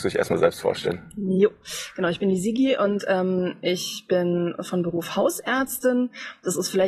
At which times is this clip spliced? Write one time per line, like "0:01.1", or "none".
none